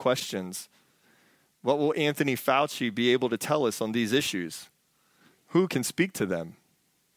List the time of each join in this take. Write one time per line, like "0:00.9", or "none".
none